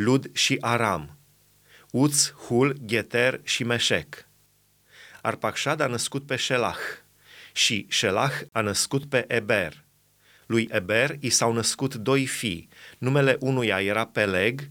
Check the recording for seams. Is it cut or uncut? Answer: uncut